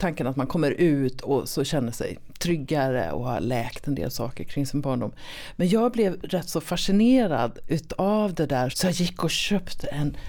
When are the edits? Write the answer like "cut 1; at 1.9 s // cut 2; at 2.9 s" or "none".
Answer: cut 1; at 8.7 s